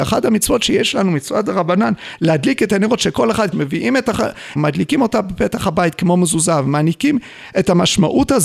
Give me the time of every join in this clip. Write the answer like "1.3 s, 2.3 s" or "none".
3.5 s, 4.6 s